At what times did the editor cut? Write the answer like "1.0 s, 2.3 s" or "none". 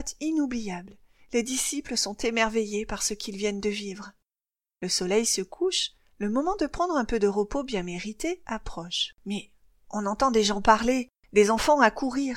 9.2 s